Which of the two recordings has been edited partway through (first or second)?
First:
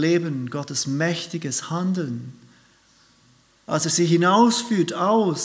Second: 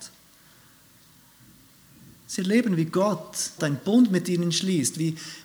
second